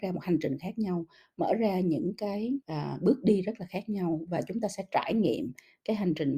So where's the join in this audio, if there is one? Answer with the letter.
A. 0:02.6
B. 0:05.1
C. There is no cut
A